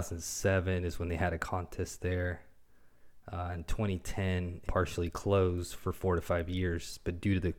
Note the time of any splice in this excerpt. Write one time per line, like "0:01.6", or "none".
0:04.6